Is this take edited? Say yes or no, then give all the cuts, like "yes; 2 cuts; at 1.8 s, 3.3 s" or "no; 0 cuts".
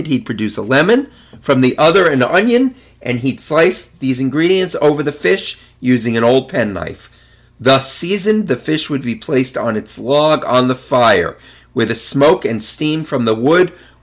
no; 0 cuts